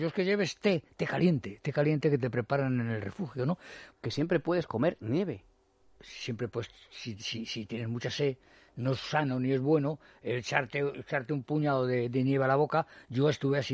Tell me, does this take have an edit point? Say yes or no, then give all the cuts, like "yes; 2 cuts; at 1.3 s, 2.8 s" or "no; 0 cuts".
yes; 2 cuts; at 3.9 s, 10.9 s